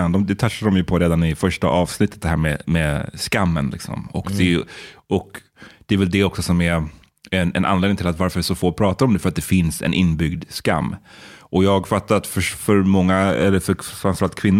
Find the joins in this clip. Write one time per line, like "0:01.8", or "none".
none